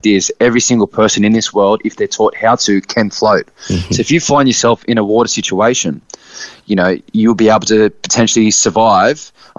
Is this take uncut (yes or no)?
yes